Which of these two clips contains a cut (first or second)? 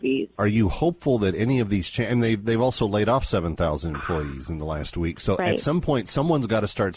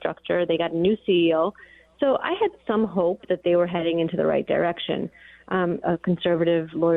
second